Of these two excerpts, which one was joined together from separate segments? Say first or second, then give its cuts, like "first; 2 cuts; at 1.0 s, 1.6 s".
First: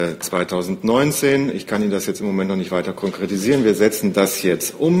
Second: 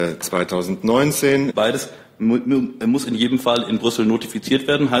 second; 1 cut; at 1.5 s